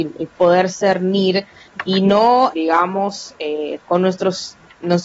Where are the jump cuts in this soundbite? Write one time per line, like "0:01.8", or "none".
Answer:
0:02.5
0:03.9